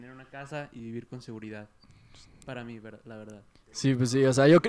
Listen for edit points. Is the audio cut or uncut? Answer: uncut